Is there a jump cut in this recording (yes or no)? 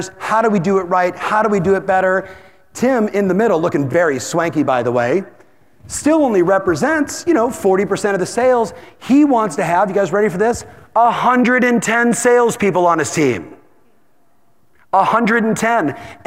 no